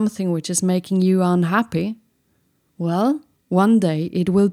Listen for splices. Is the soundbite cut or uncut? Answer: uncut